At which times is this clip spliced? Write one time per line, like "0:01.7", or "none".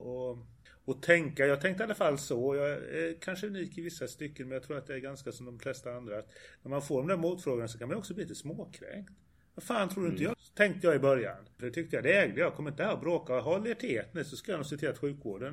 0:10.3
0:11.6